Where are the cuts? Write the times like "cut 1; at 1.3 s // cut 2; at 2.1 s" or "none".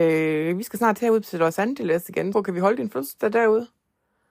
cut 1; at 2.3 s